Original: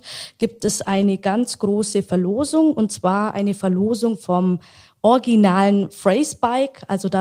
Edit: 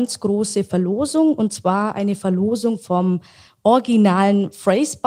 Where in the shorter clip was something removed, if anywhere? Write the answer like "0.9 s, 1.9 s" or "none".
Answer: none